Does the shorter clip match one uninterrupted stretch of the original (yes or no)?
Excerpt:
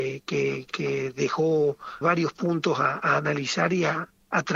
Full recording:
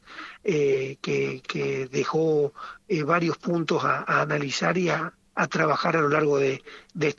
no